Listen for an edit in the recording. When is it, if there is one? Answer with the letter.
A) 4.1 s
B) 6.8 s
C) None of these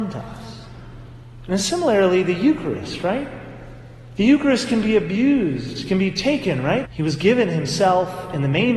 B